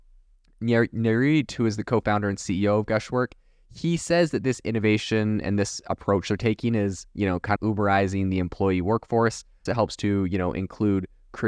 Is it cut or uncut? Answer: cut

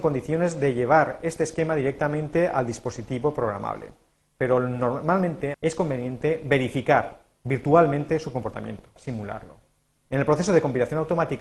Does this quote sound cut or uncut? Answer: cut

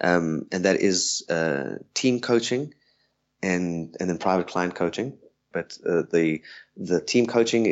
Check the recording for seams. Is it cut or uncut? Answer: cut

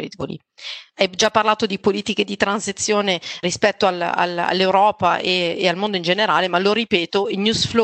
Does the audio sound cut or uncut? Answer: cut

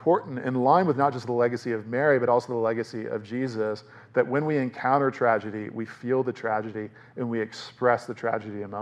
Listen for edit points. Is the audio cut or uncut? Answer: uncut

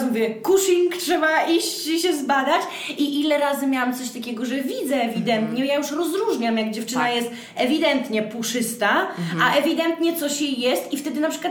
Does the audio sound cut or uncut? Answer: uncut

